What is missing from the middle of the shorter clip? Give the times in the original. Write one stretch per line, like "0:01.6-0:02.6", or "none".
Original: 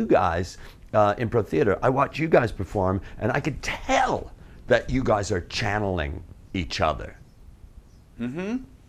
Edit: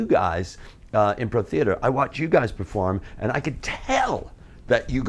none